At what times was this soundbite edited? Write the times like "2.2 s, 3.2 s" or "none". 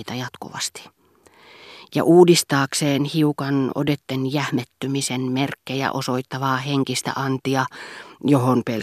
none

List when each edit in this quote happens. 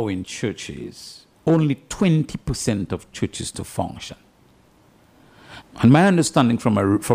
1.3 s, 5.6 s

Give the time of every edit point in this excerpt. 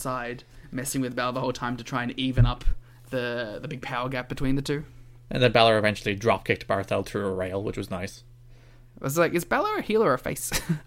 none

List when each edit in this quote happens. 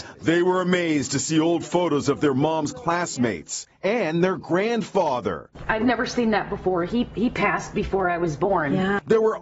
none

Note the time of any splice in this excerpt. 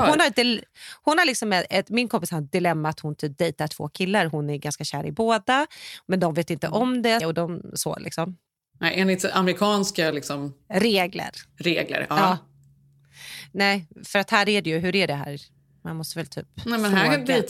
7.2 s

